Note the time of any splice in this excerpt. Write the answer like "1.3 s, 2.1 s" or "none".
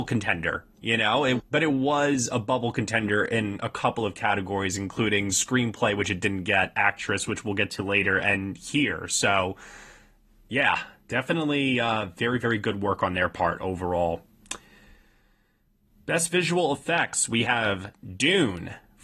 1.4 s

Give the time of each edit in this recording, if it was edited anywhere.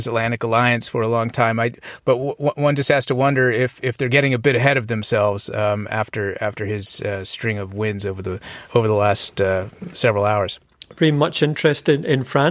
none

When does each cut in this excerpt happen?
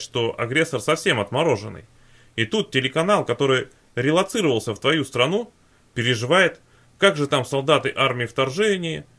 none

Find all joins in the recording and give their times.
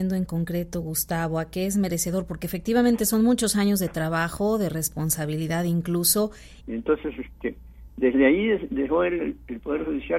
6.6 s

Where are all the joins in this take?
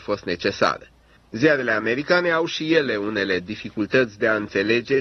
1.2 s

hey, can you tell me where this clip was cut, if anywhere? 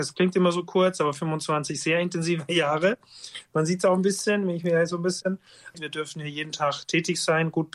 5.7 s

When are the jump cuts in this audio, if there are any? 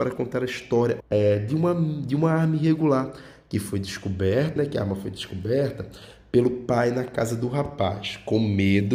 1.0 s, 4.6 s

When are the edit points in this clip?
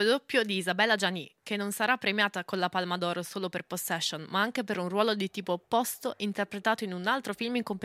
none

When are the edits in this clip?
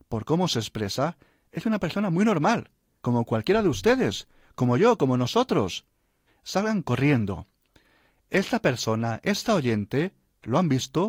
3.0 s, 6.3 s

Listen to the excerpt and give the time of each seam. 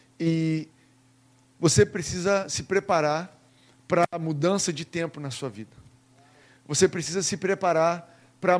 none

